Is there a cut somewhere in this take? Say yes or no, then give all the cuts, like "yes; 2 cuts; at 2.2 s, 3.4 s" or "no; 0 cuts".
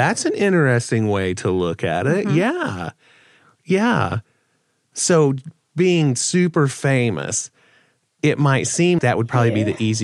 yes; 1 cut; at 9.0 s